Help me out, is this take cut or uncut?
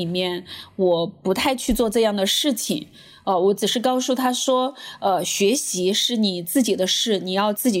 uncut